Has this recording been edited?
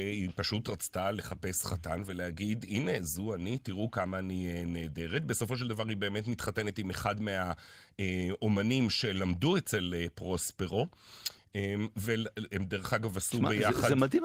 no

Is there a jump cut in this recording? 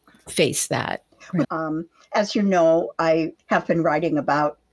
yes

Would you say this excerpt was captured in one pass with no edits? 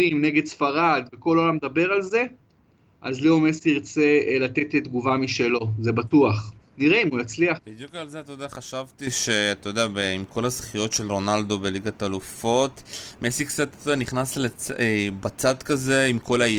yes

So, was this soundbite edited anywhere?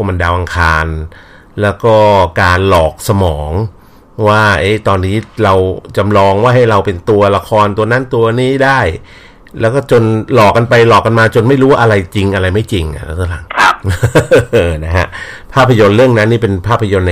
yes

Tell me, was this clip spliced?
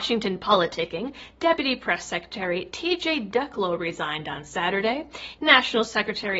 yes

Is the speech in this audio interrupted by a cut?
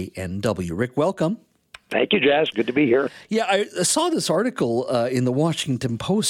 no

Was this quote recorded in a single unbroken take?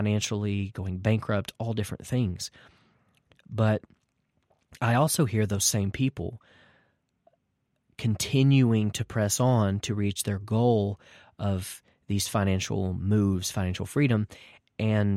yes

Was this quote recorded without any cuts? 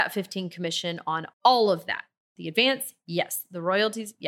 no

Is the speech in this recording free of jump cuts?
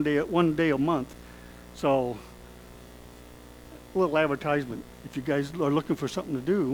yes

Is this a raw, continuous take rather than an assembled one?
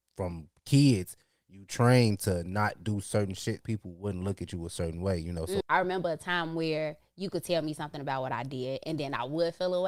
no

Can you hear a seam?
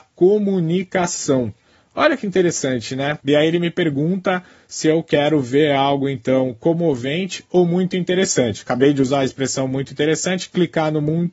yes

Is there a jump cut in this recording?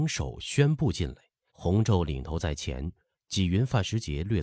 yes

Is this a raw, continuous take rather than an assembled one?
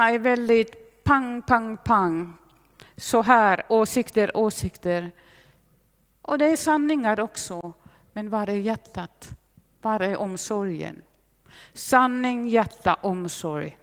yes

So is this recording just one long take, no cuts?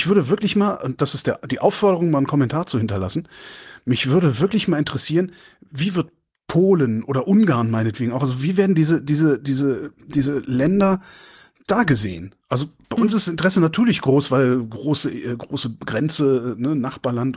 yes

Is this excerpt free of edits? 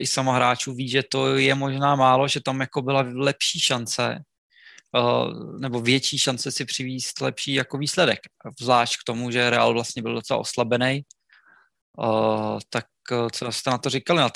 yes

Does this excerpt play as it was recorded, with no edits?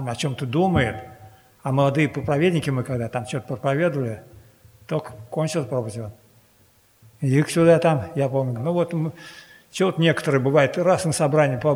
no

